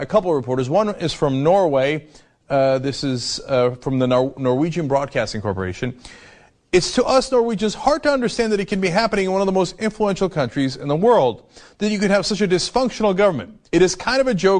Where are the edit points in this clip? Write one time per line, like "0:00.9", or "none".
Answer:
none